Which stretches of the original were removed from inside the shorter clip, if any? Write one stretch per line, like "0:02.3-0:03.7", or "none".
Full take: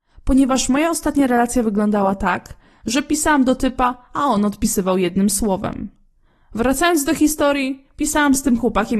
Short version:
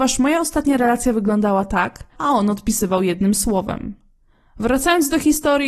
0:02.6-0:04.1